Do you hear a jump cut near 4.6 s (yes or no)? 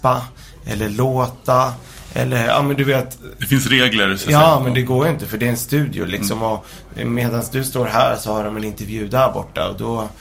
no